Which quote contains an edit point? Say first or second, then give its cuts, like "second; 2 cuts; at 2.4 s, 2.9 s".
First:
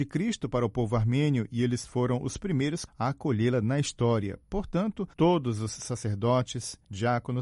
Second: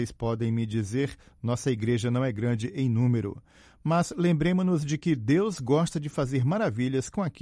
first; 2 cuts; at 2.9 s, 5.1 s